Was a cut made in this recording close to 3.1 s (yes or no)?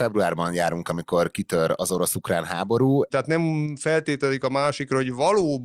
yes